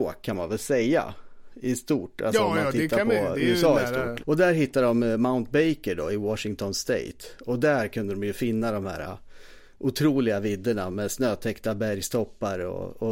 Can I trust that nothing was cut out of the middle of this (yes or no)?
no